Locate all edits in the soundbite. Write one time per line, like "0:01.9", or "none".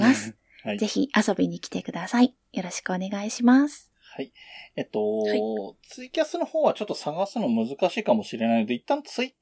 none